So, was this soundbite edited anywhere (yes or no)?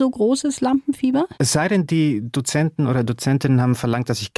yes